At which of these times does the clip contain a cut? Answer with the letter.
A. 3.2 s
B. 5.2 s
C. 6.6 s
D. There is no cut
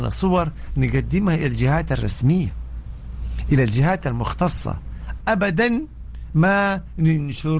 B